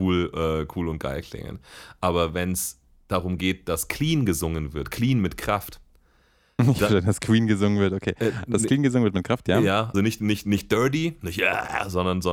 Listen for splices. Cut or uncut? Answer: cut